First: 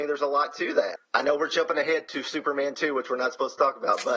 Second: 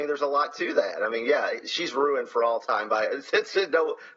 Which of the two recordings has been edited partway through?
first; 1 cut; at 1.0 s

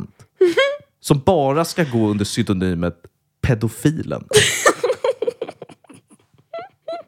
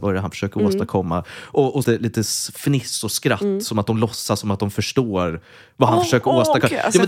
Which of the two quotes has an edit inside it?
second; 1 cut; at 1.8 s

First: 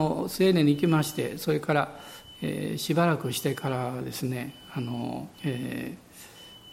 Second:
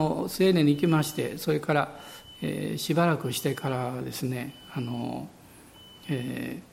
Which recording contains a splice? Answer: first; 1 cut; at 5.3 s

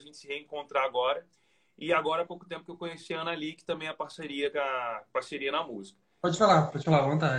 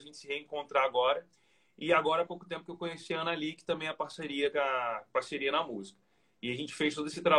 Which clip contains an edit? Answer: first; 1 cut; at 6.2 s

